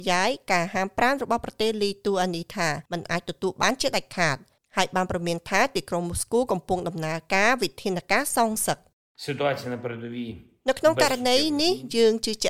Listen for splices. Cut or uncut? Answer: cut